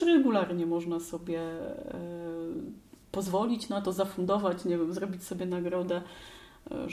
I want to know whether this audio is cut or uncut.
uncut